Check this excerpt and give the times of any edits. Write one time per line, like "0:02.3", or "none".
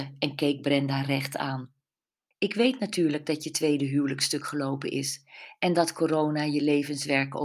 0:02.3